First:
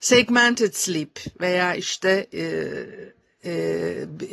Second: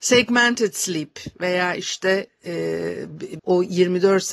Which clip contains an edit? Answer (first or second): second